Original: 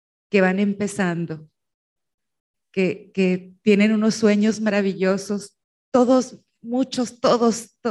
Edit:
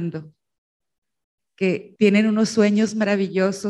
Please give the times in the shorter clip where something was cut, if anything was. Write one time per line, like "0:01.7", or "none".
0:02.0